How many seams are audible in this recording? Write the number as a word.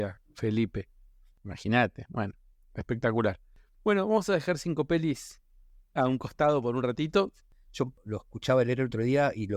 one